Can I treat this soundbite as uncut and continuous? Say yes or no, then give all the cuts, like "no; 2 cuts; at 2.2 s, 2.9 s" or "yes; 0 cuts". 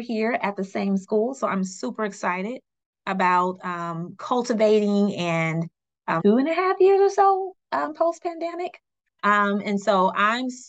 no; 1 cut; at 6.2 s